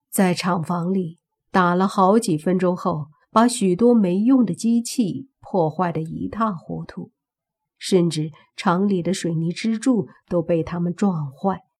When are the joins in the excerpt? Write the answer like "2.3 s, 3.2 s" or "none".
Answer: 3.2 s